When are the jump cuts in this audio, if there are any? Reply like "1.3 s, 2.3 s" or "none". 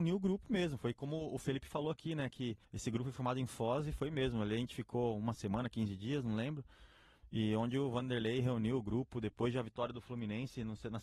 2.6 s